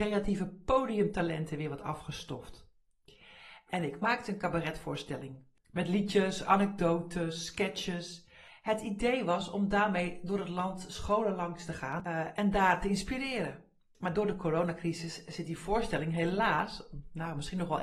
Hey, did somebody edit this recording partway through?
no; 0 cuts

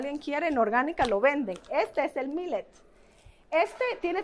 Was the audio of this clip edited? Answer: no; 0 cuts

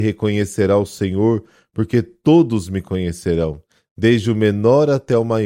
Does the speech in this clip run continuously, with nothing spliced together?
yes; 0 cuts

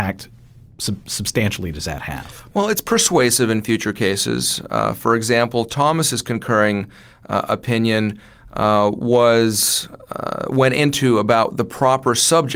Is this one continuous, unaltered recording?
yes; 0 cuts

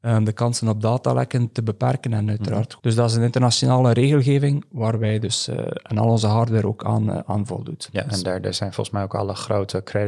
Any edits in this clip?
yes; 1 cut; at 2.8 s

